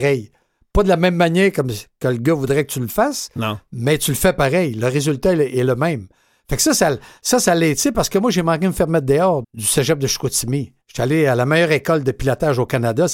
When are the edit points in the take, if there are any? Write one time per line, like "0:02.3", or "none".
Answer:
0:09.4
0:10.8